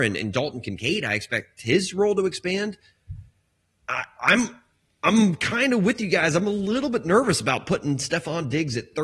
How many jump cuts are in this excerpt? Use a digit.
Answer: 0